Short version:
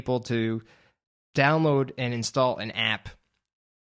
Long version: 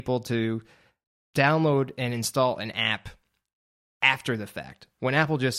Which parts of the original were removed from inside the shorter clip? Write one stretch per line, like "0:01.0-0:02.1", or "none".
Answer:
none